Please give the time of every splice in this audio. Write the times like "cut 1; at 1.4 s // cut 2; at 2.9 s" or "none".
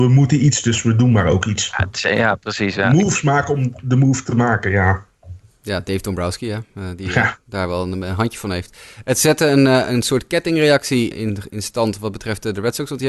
cut 1; at 11.1 s

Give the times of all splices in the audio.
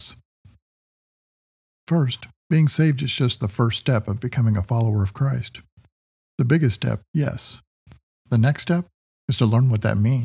none

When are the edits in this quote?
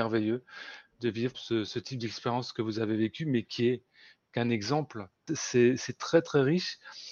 cut 1; at 1.3 s // cut 2; at 5.3 s

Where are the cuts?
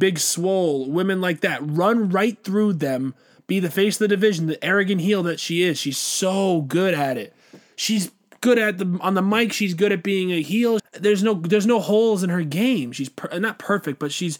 cut 1; at 10.8 s

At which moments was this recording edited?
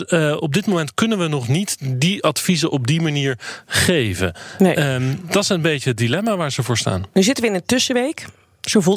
none

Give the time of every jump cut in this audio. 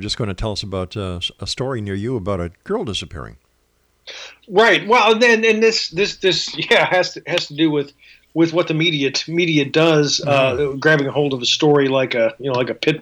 none

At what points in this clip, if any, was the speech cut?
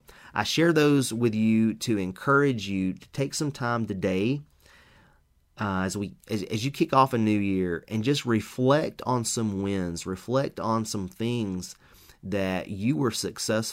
none

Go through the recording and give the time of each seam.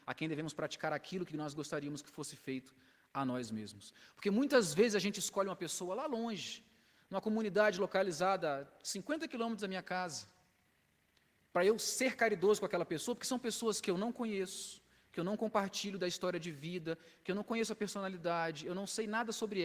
none

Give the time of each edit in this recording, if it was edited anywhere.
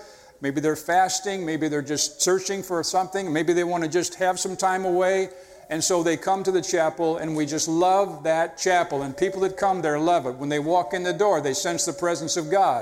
none

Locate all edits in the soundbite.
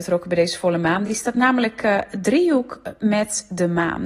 none

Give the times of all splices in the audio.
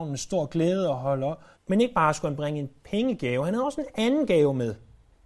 cut 1; at 1.6 s

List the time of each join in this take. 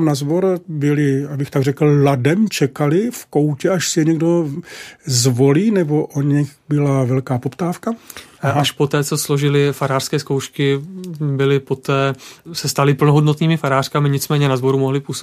cut 1; at 8.4 s

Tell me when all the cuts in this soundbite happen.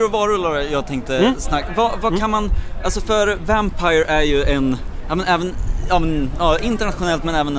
none

